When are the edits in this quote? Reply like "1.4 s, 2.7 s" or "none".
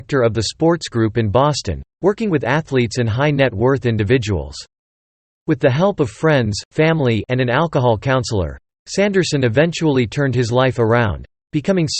5.3 s